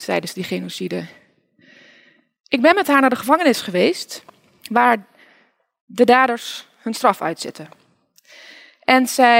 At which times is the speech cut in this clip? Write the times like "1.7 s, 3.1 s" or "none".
none